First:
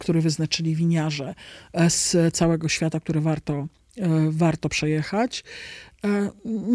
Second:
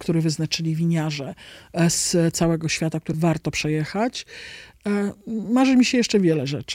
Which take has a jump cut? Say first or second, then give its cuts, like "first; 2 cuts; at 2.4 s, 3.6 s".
second; 1 cut; at 3.1 s